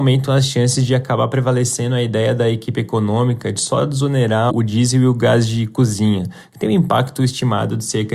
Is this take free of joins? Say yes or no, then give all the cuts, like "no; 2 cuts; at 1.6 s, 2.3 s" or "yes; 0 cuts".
no; 1 cut; at 4.5 s